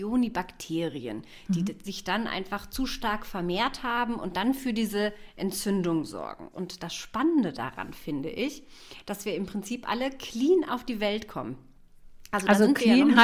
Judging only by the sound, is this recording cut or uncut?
cut